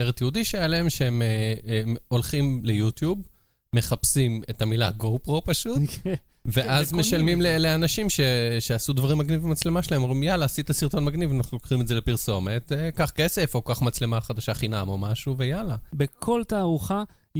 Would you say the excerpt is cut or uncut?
uncut